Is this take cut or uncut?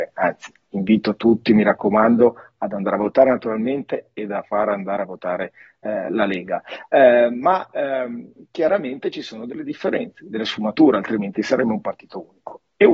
uncut